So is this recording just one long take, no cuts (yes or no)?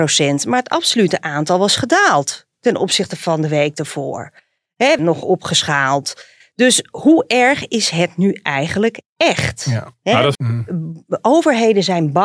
no